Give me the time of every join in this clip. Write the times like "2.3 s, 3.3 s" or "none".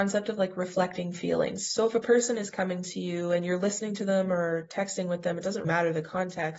5.6 s